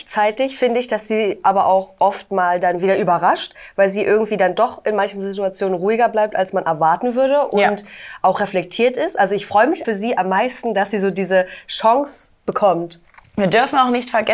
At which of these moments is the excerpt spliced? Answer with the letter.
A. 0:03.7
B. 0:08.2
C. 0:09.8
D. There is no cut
C